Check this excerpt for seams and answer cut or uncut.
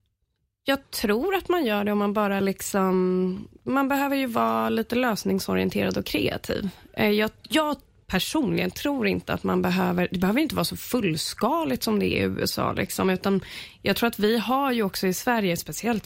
uncut